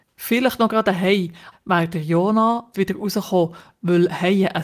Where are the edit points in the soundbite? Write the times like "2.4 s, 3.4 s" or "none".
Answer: 1.5 s, 2.7 s